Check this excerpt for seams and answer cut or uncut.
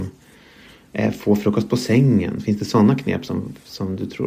uncut